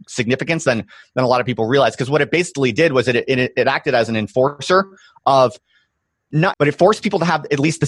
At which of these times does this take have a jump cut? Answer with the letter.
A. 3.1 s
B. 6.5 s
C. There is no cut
B